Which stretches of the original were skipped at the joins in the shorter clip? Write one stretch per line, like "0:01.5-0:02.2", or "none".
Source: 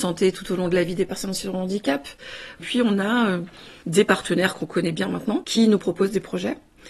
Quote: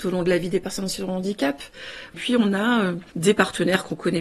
0:03.5-0:03.8